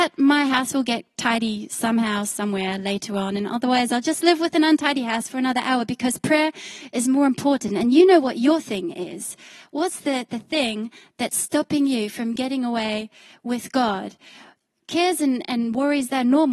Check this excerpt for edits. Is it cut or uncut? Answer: uncut